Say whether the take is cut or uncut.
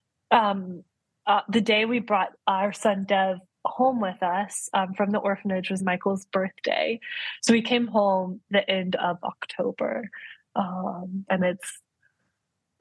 cut